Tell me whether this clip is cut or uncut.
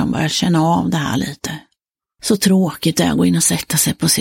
cut